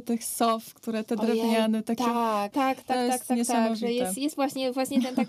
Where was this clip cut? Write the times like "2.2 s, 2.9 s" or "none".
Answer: 2.5 s